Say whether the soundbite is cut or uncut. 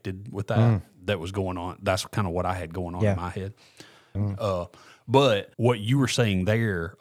cut